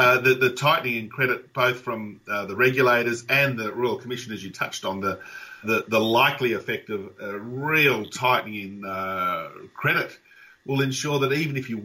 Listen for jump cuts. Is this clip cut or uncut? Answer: cut